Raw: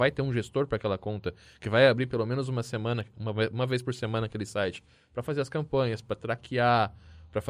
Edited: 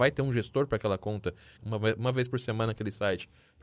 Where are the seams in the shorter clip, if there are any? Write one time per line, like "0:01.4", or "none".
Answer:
0:01.5